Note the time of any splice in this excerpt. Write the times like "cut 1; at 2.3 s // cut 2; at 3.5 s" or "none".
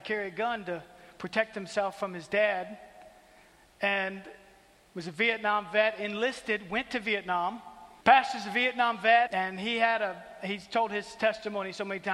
cut 1; at 8.0 s // cut 2; at 9.3 s